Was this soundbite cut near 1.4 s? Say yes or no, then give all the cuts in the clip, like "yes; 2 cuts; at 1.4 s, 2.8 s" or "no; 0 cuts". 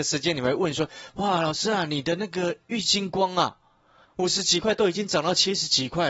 no; 1 cut; at 4.0 s